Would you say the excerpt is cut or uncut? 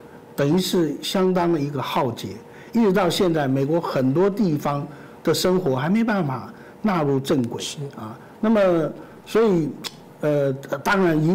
uncut